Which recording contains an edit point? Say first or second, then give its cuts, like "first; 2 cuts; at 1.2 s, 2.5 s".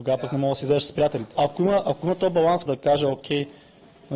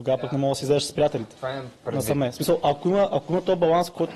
first; 2 cuts; at 1.3 s, 2.7 s